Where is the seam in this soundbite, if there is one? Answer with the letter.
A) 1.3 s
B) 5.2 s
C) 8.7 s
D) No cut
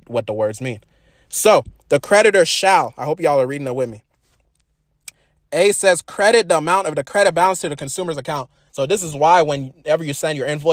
C